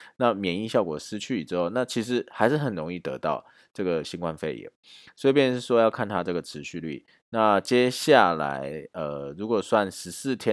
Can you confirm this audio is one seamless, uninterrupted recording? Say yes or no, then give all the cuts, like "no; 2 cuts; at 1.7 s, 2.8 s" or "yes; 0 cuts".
yes; 0 cuts